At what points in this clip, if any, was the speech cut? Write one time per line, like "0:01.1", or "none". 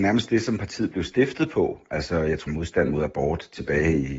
0:02.5